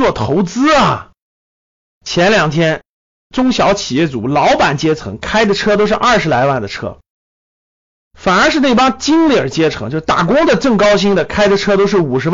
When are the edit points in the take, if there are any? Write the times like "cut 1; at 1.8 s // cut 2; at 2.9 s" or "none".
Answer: cut 1; at 3.1 s